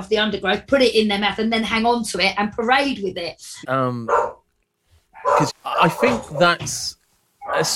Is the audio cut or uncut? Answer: cut